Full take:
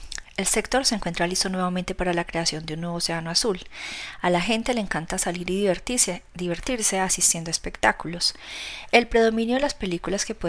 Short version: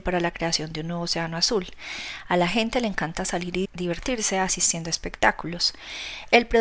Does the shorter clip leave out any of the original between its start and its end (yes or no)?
yes